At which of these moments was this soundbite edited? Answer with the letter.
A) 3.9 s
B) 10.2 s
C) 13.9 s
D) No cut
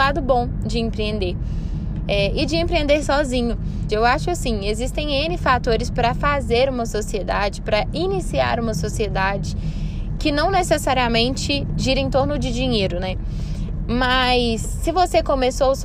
A